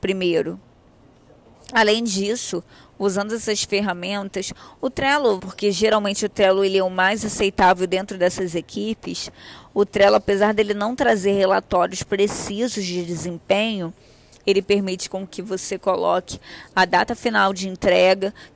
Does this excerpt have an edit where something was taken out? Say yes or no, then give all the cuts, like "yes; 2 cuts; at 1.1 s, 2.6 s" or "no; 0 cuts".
yes; 1 cut; at 5.4 s